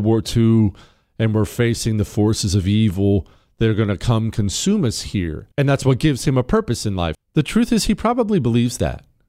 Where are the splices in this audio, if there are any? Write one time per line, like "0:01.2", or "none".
0:05.5
0:07.1